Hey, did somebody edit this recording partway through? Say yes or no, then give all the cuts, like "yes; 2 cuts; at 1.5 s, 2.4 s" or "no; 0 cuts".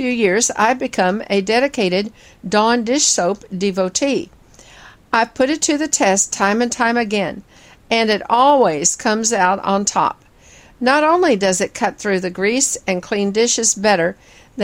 no; 0 cuts